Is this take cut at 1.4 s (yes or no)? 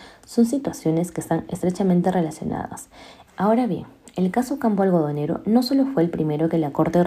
no